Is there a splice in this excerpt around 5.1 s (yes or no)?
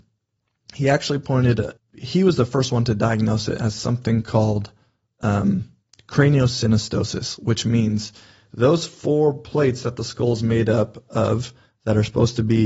no